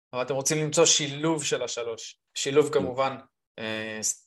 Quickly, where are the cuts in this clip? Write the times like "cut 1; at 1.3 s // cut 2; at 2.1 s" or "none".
cut 1; at 2.3 s